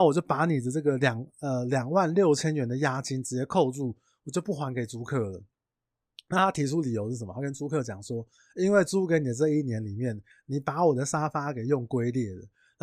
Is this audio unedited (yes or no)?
yes